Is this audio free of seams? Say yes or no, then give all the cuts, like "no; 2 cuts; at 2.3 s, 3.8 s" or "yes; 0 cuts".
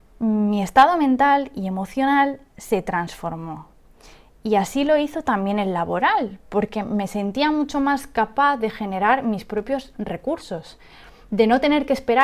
yes; 0 cuts